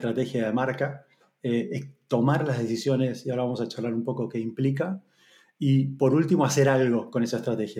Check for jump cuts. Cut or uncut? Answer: uncut